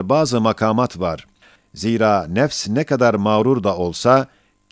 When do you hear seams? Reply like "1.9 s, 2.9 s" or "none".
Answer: 1.6 s